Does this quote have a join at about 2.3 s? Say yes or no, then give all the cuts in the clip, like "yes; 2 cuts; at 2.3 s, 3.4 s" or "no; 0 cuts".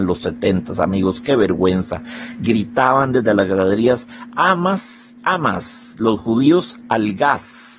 no; 0 cuts